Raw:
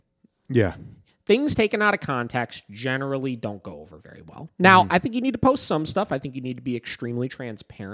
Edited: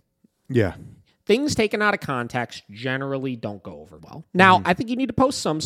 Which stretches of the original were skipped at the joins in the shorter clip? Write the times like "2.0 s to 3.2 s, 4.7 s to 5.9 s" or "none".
4.0 s to 4.2 s